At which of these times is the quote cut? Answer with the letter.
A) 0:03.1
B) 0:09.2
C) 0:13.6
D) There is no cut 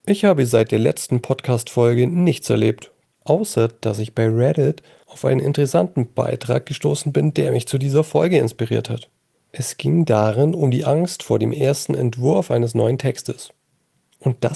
A